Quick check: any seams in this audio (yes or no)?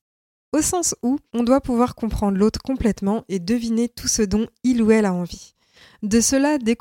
yes